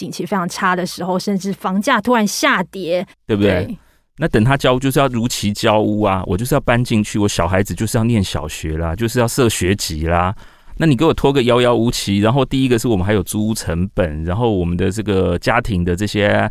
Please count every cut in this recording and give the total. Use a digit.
1